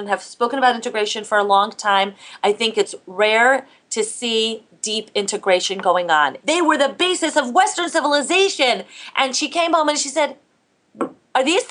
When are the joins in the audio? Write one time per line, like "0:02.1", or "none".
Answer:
0:06.4

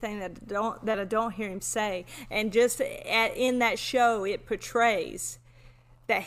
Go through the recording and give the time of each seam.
none

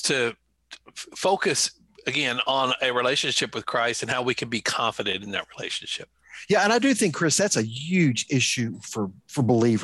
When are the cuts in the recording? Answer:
none

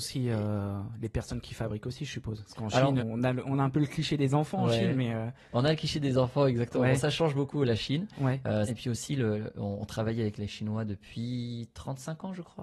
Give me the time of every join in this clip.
0:03.0
0:08.7

